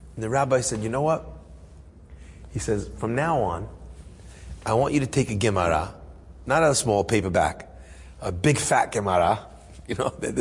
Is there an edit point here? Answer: no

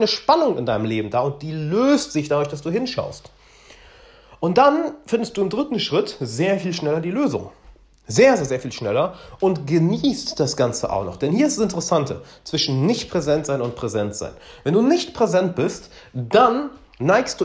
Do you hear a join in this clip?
no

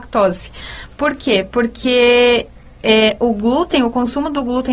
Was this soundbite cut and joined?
no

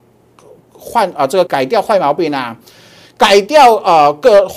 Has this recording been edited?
yes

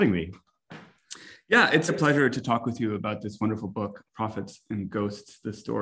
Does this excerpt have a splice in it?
yes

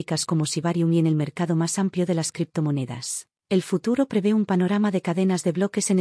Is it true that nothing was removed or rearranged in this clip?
no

